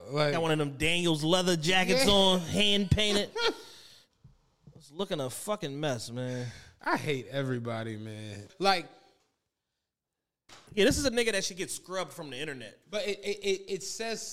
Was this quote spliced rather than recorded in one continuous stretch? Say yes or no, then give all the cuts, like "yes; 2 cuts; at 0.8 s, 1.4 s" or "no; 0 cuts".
yes; 3 cuts; at 8.5 s, 10.7 s, 12.8 s